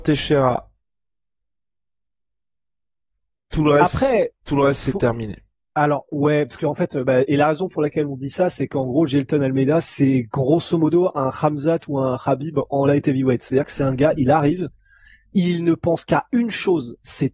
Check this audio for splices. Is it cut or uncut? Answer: uncut